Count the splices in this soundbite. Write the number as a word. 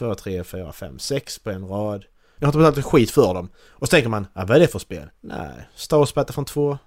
two